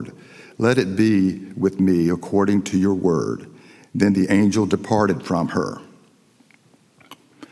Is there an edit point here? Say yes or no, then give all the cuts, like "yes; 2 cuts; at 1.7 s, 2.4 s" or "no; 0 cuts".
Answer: no; 0 cuts